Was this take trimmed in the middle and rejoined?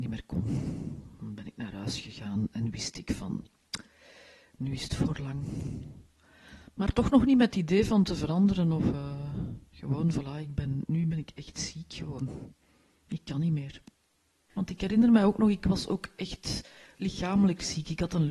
yes; 2 cuts; at 9.7 s, 14.6 s

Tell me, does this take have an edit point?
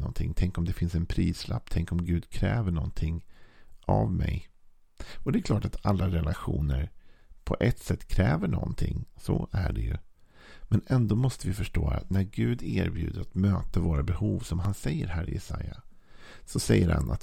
no; 0 cuts

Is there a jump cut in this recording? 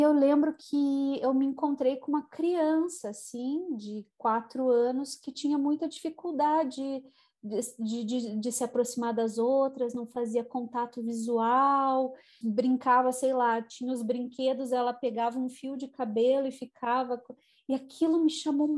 yes; 1 cut; at 12.4 s

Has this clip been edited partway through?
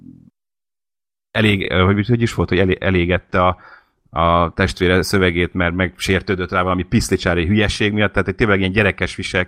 no; 0 cuts

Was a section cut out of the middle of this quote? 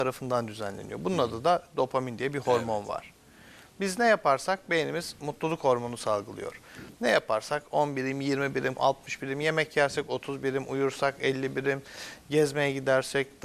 yes; 1 cut; at 8.8 s

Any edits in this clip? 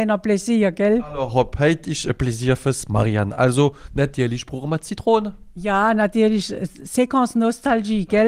no; 0 cuts

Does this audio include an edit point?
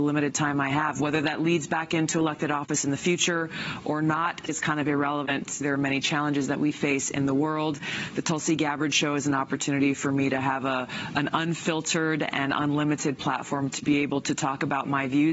yes; 2 cuts; at 4.5 s, 5.6 s

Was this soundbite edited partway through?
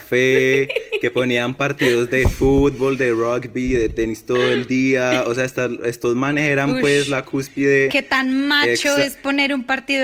no; 0 cuts

